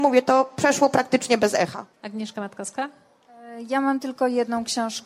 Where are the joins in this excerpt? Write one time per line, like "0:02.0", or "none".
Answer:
0:01.9